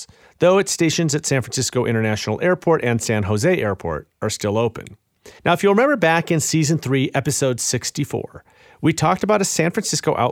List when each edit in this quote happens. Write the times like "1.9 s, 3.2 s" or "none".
5.4 s